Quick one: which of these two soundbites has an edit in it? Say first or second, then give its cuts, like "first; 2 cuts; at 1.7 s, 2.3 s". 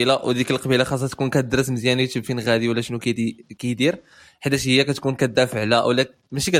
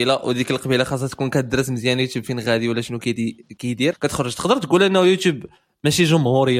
second; 1 cut; at 3.9 s